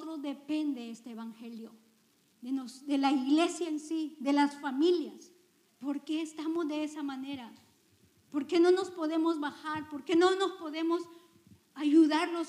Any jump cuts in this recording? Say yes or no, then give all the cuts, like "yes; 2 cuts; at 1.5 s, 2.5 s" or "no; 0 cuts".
yes; 1 cut; at 5.7 s